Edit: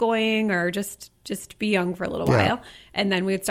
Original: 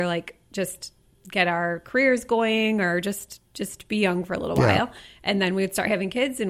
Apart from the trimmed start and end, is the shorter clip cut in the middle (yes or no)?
no